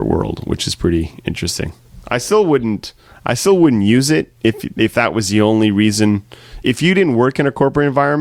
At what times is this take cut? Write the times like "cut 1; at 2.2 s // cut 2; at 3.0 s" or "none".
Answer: cut 1; at 4.4 s // cut 2; at 6.6 s